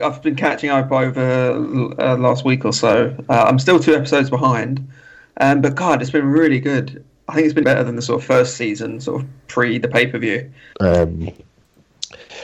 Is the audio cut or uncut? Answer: cut